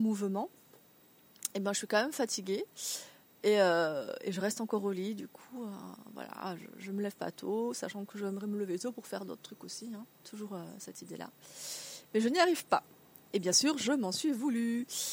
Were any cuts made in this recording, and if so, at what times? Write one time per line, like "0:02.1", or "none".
none